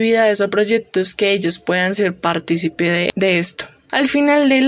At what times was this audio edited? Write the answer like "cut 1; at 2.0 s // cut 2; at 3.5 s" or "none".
none